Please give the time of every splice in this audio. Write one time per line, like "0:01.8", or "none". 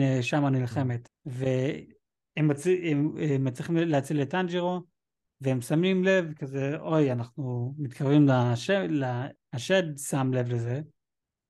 0:01.1
0:09.4